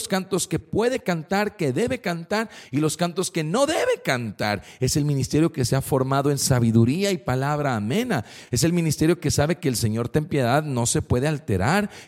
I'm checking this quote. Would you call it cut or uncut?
uncut